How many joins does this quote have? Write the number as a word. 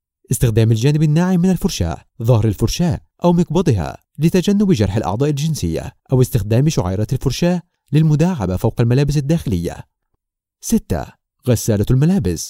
zero